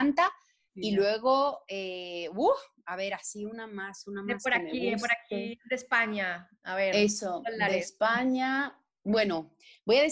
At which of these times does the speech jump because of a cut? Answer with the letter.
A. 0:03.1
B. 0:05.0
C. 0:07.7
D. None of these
D